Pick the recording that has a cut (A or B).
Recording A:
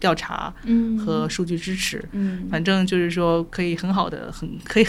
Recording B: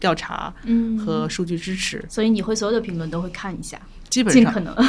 A